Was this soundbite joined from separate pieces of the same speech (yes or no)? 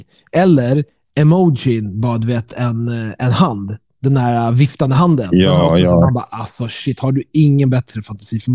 no